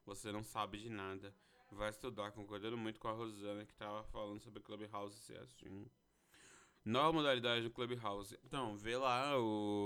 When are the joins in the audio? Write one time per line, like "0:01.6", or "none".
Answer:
0:06.7
0:08.4